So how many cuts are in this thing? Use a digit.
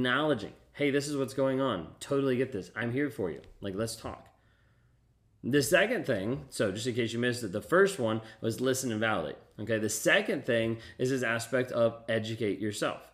0